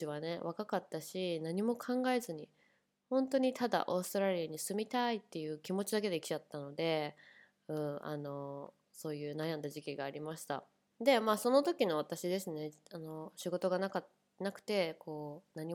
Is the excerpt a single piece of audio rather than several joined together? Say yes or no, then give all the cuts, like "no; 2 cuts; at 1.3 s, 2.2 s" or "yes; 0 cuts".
yes; 0 cuts